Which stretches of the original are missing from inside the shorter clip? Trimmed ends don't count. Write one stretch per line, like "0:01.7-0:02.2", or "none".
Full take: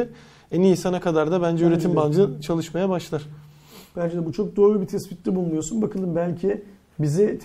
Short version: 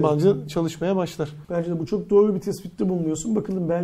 0:03.4-0:03.9